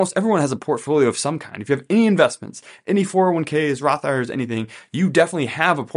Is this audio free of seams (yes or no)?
yes